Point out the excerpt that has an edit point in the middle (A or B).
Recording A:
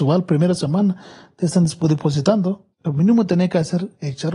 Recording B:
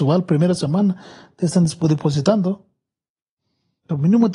A